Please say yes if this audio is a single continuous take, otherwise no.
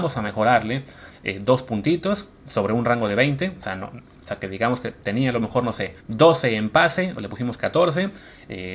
no